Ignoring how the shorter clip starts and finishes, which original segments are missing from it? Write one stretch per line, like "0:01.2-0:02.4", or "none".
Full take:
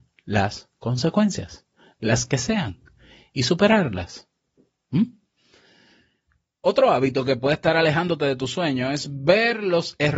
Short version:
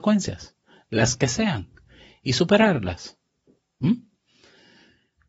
none